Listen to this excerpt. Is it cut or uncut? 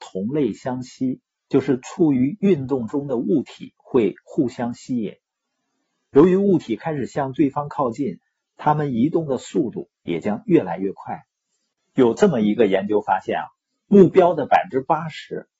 uncut